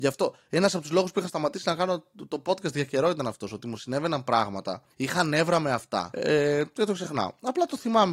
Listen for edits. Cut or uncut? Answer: cut